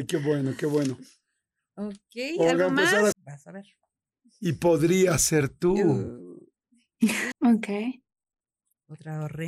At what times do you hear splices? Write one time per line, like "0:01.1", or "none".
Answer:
0:03.1
0:07.3